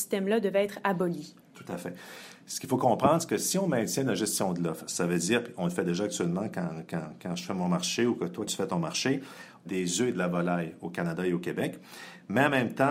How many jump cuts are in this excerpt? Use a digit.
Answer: 2